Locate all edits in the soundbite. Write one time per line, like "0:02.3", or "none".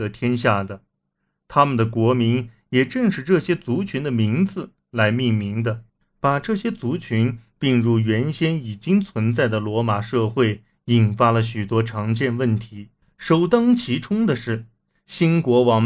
none

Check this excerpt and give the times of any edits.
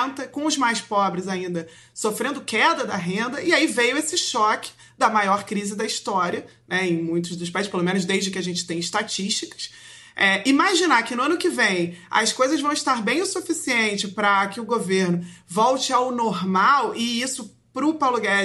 none

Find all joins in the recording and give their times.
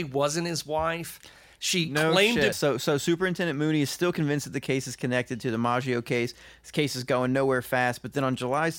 0:02.5

